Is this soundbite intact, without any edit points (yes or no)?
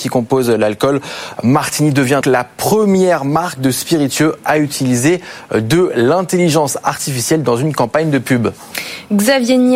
no